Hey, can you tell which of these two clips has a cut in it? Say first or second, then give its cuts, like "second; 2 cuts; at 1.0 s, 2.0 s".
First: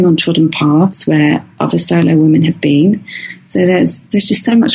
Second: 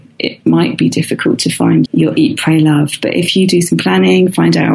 second; 1 cut; at 1.8 s